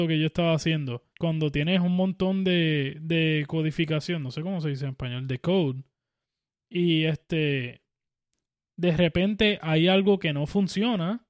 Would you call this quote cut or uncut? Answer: cut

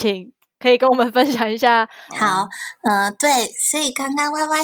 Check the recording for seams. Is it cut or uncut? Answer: cut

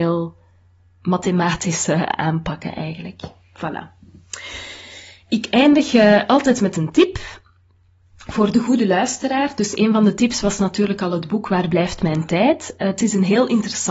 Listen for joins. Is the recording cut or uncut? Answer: uncut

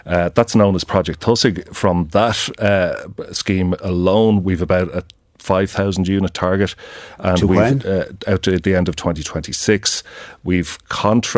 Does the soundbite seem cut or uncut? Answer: uncut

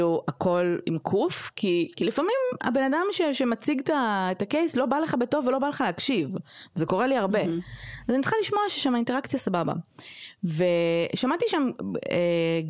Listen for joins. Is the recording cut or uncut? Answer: uncut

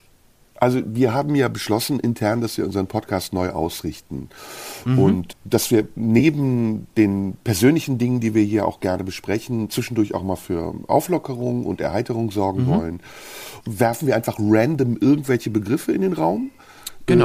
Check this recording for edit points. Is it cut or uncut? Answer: cut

